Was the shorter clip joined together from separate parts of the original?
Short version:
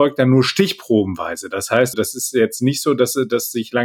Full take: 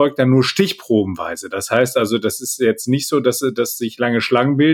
yes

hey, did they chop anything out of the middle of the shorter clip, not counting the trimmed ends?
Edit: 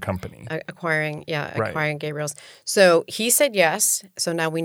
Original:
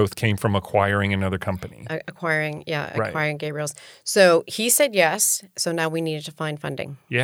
no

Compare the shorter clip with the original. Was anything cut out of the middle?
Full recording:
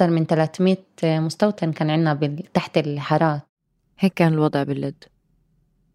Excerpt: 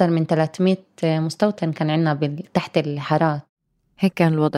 no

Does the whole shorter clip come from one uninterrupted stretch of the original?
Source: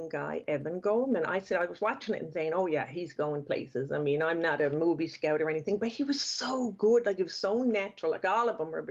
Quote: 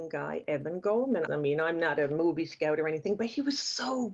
no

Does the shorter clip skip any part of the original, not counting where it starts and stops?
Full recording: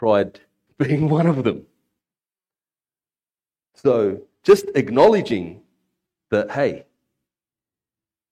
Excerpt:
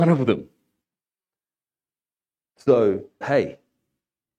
yes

